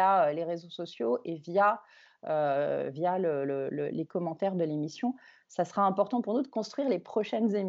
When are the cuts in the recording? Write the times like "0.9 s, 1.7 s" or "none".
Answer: none